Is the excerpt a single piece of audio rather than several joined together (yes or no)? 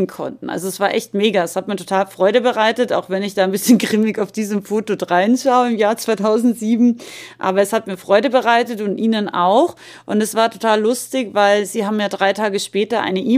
yes